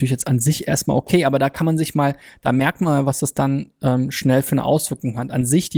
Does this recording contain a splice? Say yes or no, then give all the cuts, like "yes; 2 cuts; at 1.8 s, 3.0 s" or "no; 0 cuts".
no; 0 cuts